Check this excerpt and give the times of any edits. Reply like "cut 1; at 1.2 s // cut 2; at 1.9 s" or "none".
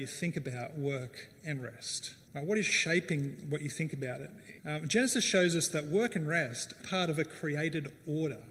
cut 1; at 2.2 s // cut 2; at 4.6 s // cut 3; at 6.8 s